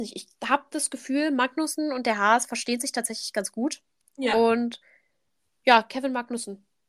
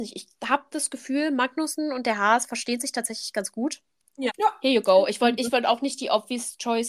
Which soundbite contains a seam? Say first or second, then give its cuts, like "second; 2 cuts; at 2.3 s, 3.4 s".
second; 1 cut; at 4.3 s